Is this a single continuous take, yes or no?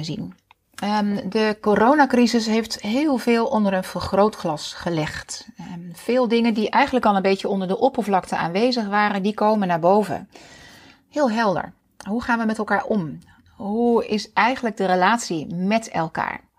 yes